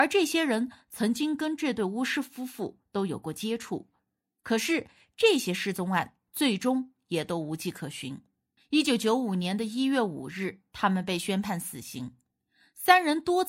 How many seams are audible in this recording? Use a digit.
1